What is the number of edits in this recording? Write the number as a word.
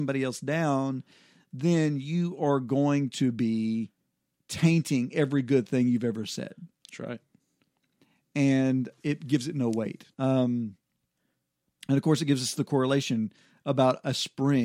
two